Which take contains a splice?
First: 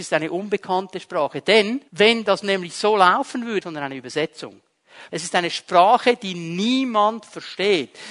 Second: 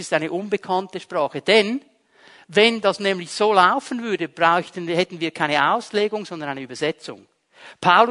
first; 3 cuts; at 1.9 s, 3.6 s, 5.1 s

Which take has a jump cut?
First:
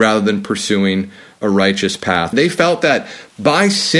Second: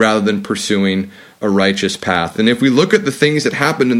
first; 1 cut; at 2.3 s

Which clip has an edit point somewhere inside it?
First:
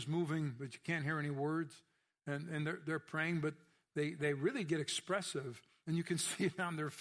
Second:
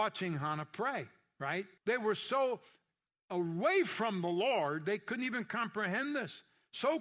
second; 1 cut; at 1.8 s

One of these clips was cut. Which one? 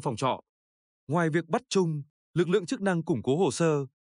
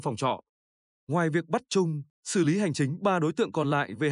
second; 1 cut; at 2.1 s

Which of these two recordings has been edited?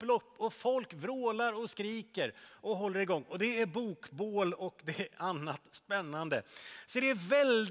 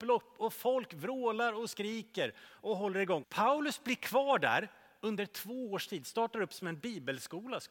second; 1 cut; at 3.2 s

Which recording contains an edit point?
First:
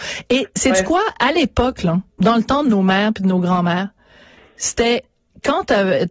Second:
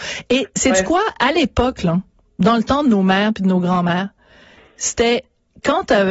first; 1 cut; at 2.1 s

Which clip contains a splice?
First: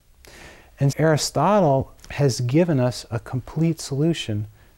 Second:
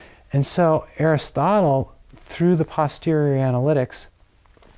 first; 2 cuts; at 0.9 s, 2.0 s

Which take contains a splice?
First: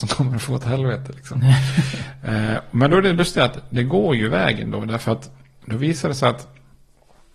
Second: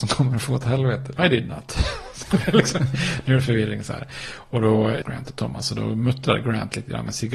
second; 2 cuts; at 1.2 s, 5.0 s

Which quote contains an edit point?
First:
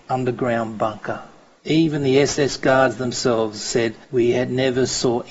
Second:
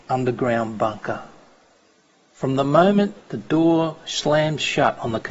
first; 2 cuts; at 1.6 s, 4.0 s

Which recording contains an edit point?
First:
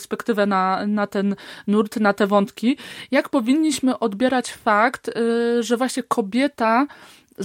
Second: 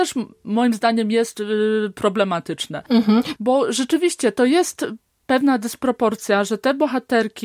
second; 1 cut; at 3.4 s

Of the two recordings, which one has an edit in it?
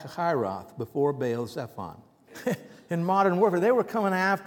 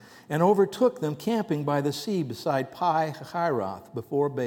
first; 1 cut; at 2.3 s

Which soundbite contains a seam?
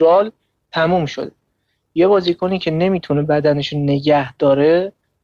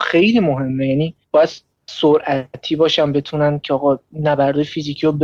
second; 1 cut; at 1.2 s

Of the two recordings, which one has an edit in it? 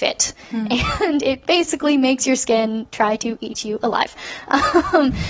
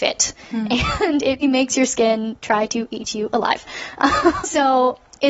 second; 2 cuts; at 1.4 s, 4.4 s

